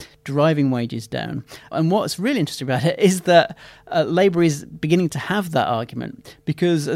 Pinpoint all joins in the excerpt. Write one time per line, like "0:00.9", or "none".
0:01.7

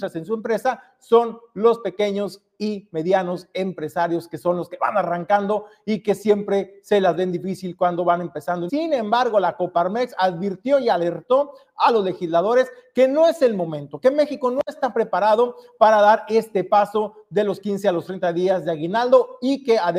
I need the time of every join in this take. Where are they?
0:08.7

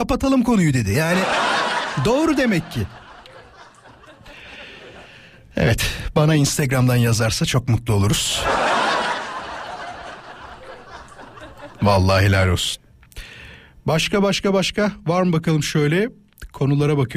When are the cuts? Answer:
none

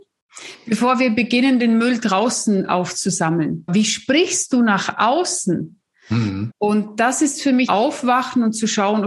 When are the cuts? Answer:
0:03.7
0:06.5
0:07.7

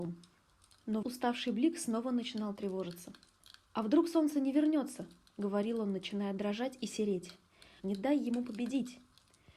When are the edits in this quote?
0:01.0
0:07.8

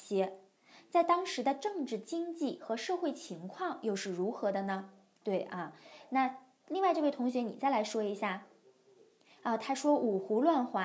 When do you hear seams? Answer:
0:05.2

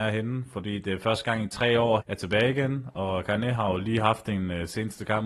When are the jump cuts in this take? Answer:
0:02.0

